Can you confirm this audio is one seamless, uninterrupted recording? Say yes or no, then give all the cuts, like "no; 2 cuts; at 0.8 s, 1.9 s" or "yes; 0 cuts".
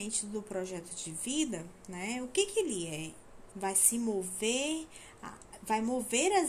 no; 1 cut; at 3.5 s